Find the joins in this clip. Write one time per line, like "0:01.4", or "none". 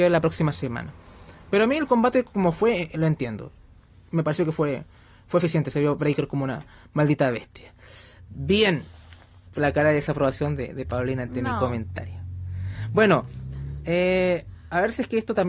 0:09.5